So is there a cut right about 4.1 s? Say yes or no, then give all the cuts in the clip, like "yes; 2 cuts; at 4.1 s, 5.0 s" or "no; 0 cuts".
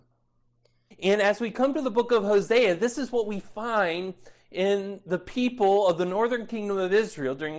no; 1 cut; at 0.9 s